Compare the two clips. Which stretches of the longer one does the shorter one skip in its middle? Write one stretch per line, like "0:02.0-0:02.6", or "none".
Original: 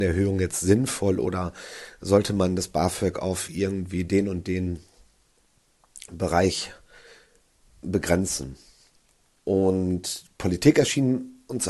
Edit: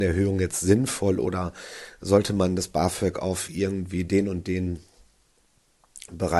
none